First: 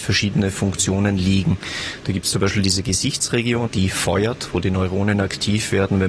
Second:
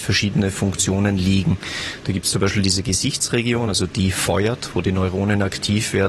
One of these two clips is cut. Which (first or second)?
first